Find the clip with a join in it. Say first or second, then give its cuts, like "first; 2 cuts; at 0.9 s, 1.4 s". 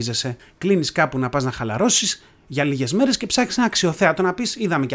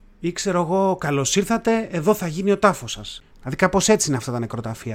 second; 1 cut; at 3.3 s